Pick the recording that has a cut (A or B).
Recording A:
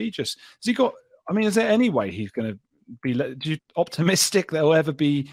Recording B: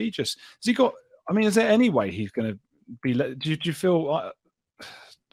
A